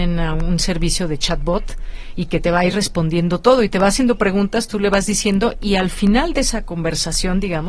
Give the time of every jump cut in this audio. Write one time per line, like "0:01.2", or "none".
none